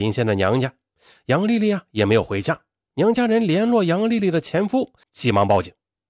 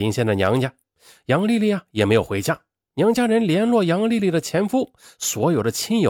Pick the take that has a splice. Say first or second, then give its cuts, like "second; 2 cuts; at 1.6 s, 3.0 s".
first; 1 cut; at 5.0 s